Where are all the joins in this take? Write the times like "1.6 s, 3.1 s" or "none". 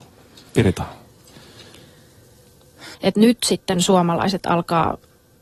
2.9 s